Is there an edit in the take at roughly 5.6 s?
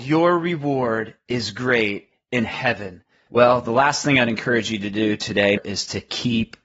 yes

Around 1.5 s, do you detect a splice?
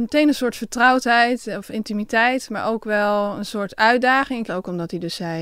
no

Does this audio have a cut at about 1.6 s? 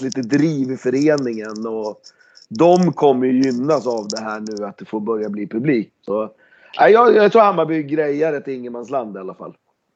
no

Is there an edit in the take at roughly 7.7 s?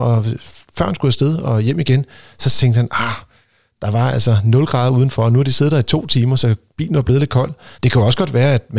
yes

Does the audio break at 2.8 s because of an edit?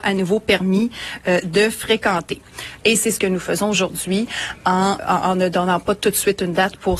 yes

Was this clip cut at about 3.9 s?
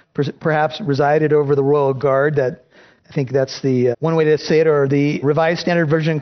yes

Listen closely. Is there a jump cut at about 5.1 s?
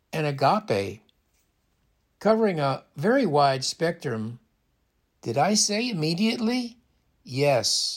yes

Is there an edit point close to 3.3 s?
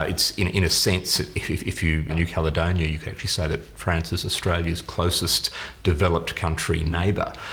no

